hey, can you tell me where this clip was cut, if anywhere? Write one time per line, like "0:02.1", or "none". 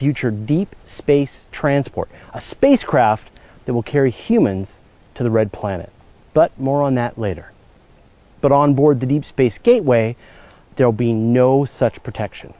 0:08.4